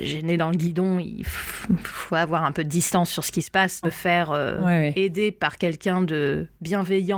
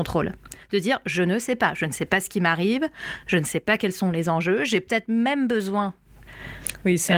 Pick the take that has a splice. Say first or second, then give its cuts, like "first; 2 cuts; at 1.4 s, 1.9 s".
first; 1 cut; at 3.8 s